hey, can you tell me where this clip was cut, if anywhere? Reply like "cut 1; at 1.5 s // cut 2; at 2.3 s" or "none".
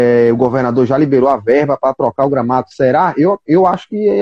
none